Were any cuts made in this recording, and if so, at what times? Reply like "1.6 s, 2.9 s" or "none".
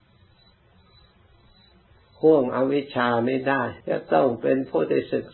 3.8 s